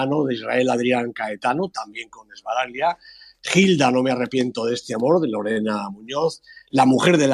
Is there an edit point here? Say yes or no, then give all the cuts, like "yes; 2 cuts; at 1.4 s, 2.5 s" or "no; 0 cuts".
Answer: no; 0 cuts